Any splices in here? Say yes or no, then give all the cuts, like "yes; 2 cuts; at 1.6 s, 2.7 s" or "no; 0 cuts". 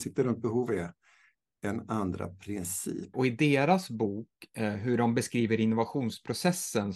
yes; 1 cut; at 3.1 s